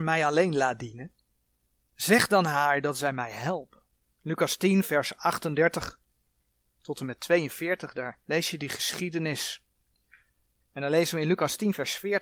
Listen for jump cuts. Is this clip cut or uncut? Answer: cut